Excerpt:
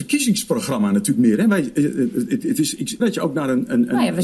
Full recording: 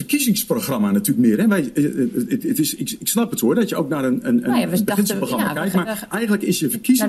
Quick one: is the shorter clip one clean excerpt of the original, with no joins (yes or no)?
no